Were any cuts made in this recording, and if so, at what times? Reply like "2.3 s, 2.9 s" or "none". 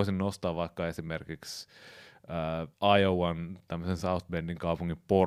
2.7 s